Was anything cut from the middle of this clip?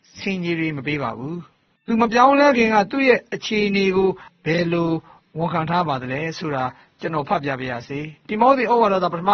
yes; 1 cut; at 8.2 s

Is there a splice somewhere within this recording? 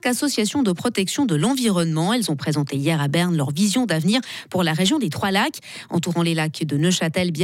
no; 0 cuts

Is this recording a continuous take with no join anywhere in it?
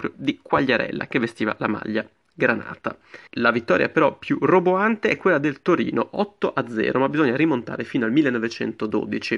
no; 1 cut; at 3.3 s

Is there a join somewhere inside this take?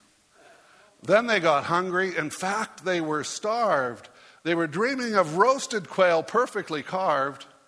no; 0 cuts

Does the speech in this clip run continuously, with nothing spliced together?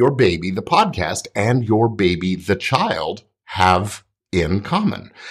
yes; 0 cuts

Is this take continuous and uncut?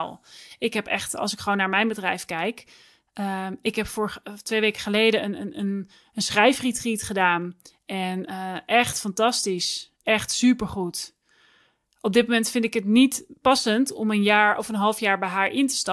yes; 0 cuts

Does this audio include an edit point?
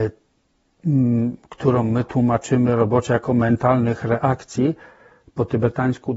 no; 0 cuts

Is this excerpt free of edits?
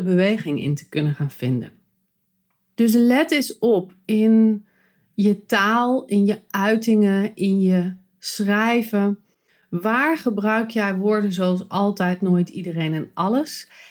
yes; 0 cuts

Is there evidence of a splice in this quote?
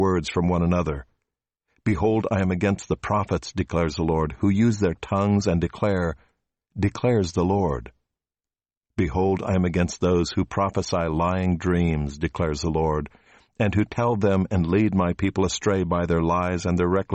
no; 0 cuts

